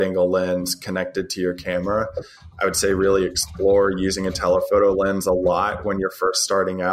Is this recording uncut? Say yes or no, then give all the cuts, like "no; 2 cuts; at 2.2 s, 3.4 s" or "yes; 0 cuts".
yes; 0 cuts